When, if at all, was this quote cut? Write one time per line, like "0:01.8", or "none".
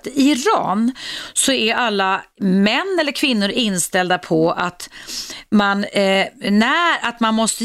none